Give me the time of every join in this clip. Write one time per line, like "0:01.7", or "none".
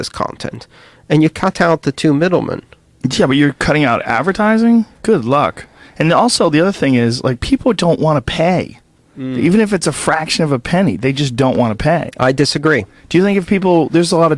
none